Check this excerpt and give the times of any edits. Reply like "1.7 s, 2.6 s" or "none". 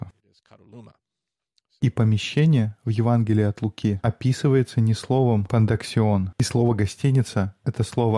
6.3 s